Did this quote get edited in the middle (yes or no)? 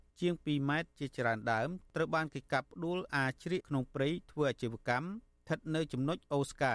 yes